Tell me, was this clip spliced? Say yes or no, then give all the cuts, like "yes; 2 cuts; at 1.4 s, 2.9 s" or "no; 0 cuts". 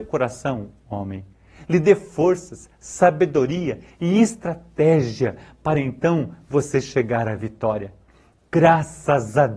no; 0 cuts